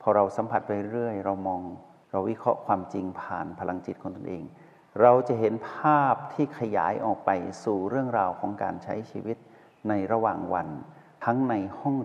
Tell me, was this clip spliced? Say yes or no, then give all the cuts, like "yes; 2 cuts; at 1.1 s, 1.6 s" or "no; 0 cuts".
no; 0 cuts